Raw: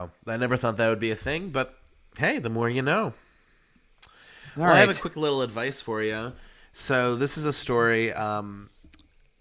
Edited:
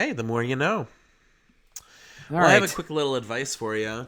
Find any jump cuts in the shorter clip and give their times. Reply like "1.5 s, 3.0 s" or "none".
none